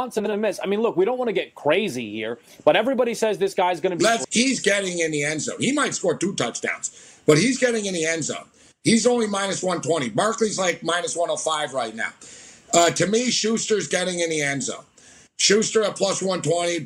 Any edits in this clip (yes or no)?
yes